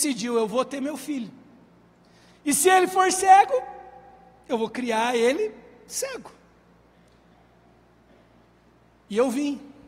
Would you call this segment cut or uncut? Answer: uncut